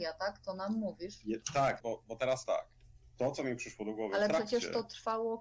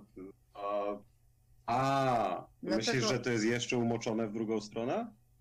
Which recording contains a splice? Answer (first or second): first